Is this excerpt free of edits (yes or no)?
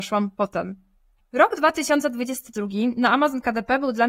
no